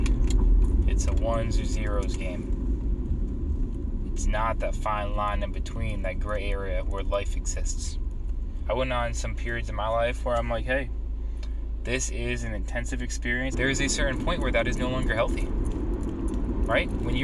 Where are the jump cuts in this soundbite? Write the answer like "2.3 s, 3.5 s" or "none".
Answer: 8.6 s, 13.5 s